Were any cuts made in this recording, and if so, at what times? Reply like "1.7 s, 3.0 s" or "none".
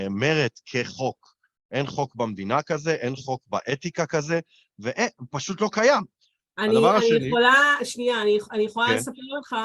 1.7 s, 6.4 s